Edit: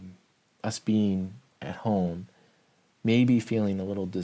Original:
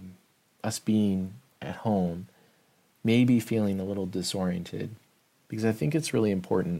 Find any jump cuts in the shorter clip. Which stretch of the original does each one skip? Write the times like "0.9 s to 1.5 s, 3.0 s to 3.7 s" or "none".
none